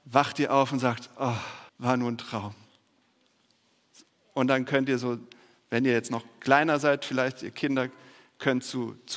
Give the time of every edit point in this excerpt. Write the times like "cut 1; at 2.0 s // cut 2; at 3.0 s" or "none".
cut 1; at 1.7 s